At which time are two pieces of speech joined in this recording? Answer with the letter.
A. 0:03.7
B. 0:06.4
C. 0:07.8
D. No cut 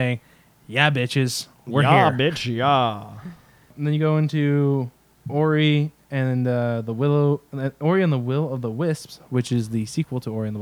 D